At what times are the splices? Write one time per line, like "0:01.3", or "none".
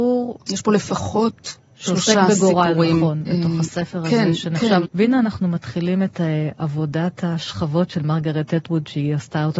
0:03.2
0:04.8